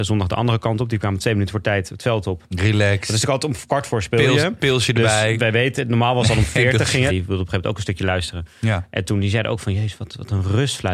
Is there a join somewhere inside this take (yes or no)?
yes